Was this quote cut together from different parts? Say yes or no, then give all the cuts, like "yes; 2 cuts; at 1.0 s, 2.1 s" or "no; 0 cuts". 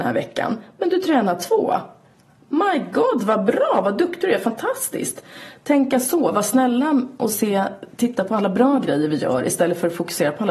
no; 0 cuts